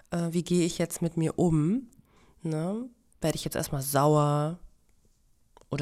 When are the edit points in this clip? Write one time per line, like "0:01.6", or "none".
none

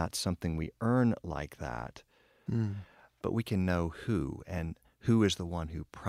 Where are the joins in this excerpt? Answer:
0:02.5

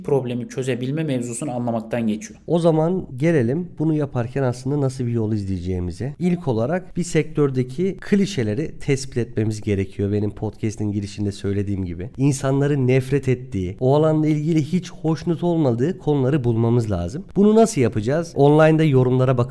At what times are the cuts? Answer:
none

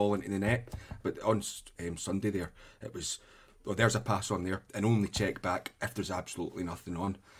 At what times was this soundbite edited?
0:01.0
0:04.7

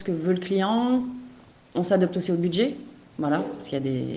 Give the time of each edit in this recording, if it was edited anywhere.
none

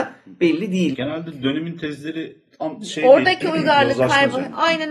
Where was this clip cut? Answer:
0:00.9

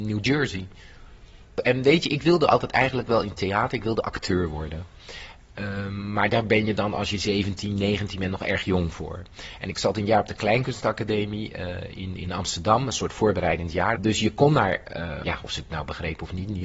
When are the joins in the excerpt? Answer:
0:13.9
0:15.2

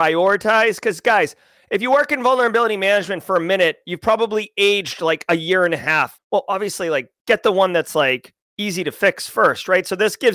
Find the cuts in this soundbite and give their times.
0:06.2

